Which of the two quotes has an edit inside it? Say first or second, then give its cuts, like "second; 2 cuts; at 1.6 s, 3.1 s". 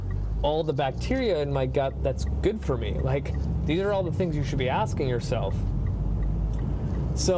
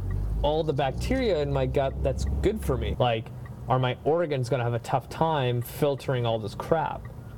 second; 1 cut; at 2.9 s